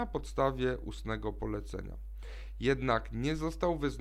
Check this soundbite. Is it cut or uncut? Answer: uncut